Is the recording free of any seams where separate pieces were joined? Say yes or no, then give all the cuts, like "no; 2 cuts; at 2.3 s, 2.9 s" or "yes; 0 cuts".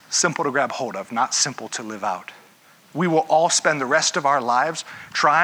yes; 0 cuts